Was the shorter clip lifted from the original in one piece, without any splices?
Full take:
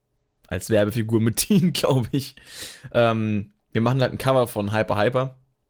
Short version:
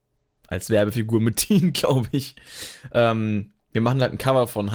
yes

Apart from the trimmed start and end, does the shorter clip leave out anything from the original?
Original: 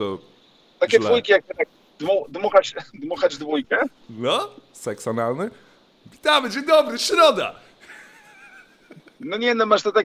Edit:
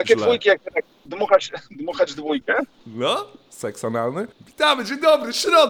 yes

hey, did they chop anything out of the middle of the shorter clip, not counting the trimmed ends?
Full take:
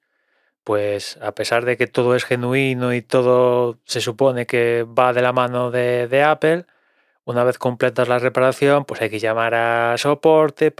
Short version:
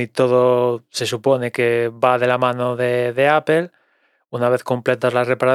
no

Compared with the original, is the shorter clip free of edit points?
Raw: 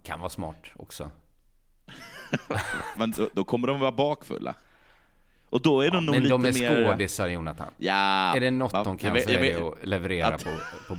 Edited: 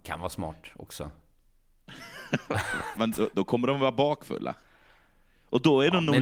yes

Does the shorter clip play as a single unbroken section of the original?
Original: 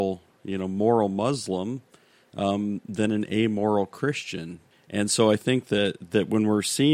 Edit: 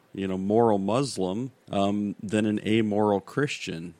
no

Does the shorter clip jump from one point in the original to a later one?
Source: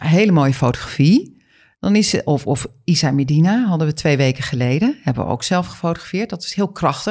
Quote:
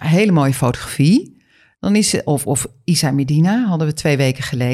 no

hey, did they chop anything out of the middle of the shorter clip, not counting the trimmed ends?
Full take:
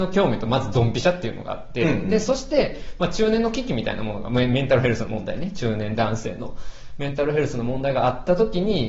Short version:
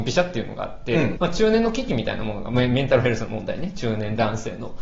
yes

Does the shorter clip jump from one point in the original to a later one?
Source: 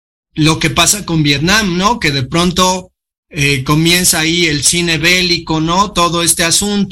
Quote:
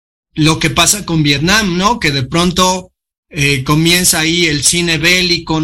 no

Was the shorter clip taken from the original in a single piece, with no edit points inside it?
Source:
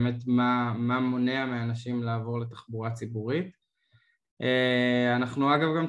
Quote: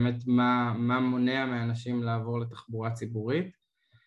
yes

